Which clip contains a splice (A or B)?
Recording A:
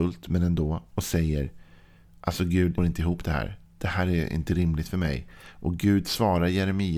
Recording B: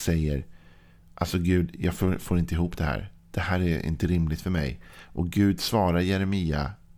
A